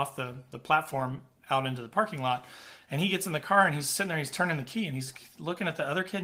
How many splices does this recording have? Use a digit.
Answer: 0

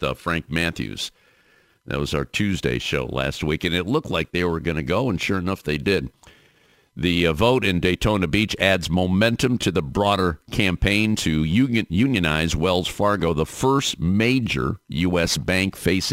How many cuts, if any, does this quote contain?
0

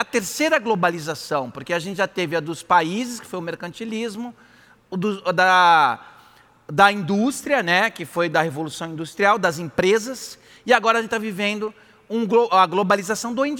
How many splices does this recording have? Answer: 0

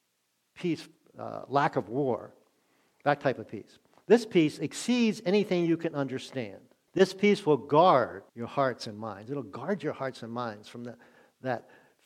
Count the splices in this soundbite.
2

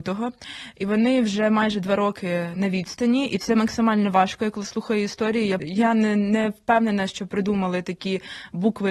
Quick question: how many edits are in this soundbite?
1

